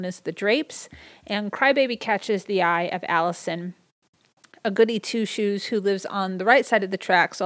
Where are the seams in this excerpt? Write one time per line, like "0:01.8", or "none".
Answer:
none